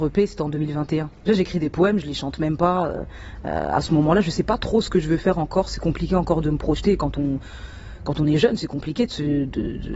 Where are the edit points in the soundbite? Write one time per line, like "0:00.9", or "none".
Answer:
0:01.3